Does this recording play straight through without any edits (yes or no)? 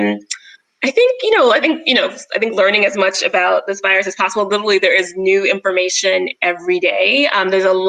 yes